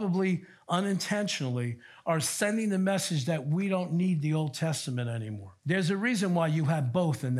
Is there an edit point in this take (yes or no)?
yes